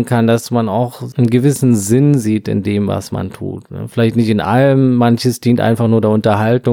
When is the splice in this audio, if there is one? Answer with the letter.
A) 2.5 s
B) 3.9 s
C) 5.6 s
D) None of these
D